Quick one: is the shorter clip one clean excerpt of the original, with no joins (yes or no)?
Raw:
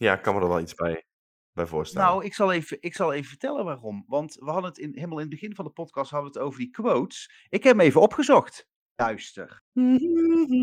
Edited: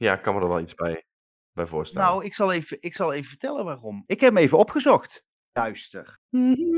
no